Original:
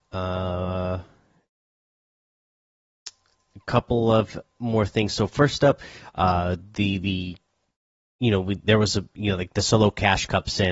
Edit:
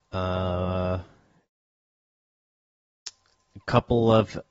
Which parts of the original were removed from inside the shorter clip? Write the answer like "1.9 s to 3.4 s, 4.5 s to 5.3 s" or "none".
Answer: none